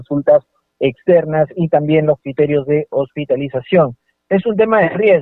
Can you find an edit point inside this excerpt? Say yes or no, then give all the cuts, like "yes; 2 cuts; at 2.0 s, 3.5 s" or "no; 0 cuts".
no; 0 cuts